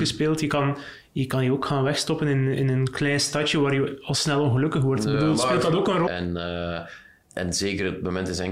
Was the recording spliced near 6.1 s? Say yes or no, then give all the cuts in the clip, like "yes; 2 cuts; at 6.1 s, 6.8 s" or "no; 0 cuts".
yes; 1 cut; at 6.1 s